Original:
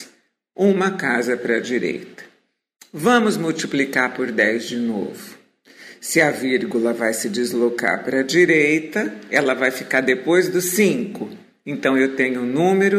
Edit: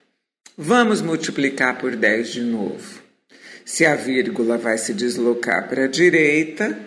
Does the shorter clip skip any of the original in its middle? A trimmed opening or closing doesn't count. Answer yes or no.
no